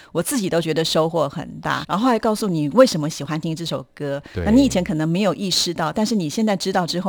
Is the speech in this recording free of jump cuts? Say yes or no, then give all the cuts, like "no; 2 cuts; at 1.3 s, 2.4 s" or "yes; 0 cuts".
no; 1 cut; at 1.8 s